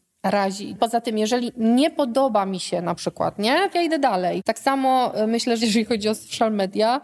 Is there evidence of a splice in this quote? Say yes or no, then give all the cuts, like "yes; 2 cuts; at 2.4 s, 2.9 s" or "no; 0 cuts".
yes; 2 cuts; at 3.7 s, 5.6 s